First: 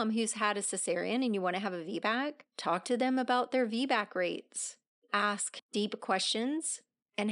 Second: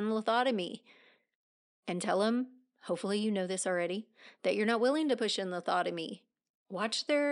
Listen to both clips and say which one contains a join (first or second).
first